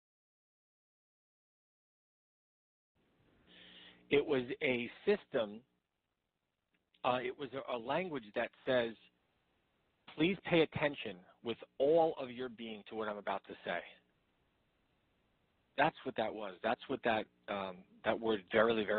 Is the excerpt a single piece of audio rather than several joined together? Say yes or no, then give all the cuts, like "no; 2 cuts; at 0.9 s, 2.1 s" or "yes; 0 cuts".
yes; 0 cuts